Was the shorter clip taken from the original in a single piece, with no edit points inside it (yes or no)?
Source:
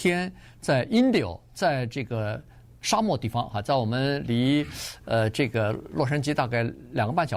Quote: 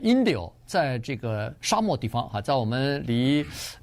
no